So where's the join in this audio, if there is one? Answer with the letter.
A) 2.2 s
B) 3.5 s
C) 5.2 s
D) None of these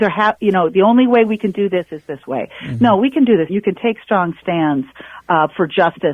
B